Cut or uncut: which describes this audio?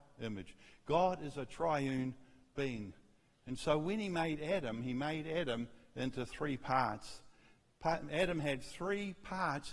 cut